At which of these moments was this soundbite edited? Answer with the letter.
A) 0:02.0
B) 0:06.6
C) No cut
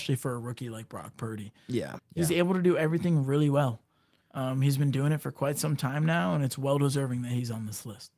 A